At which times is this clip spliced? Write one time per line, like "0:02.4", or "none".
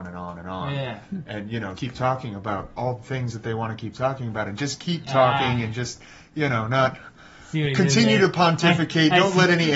0:01.8